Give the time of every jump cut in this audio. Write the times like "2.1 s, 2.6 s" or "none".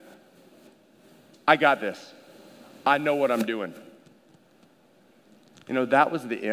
none

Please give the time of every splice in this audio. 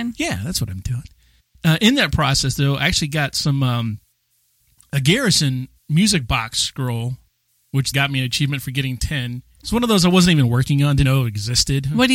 7.9 s, 9.6 s, 11.0 s

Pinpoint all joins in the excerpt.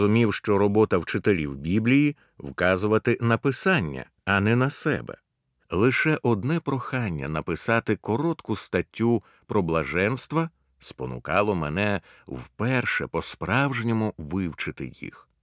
5.6 s

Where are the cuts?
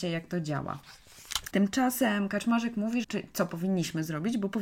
1.5 s, 3.0 s

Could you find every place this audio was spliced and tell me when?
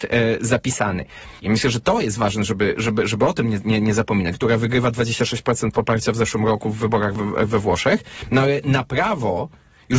1.4 s, 4.3 s

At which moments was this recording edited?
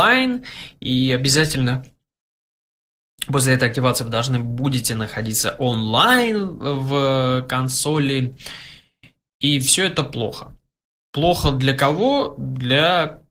none

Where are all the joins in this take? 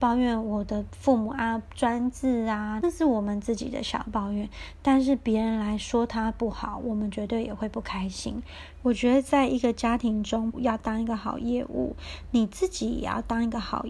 2.8 s, 8.7 s, 10.5 s

